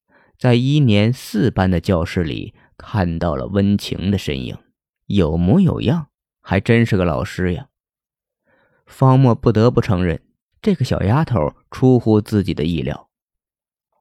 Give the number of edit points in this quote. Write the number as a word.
one